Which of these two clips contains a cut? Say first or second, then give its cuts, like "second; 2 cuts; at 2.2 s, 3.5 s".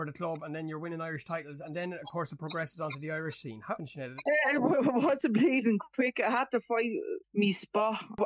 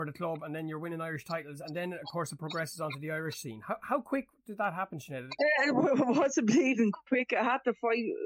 first; 1 cut; at 3.8 s